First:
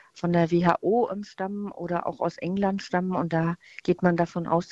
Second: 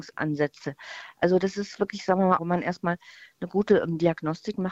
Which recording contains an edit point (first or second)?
second